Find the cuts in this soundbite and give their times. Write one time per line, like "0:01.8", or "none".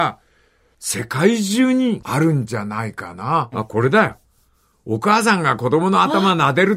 0:03.5